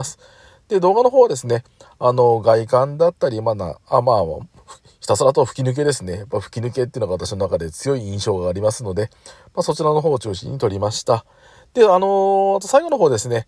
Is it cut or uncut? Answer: uncut